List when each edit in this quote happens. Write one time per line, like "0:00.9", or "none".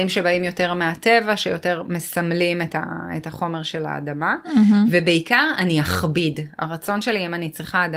none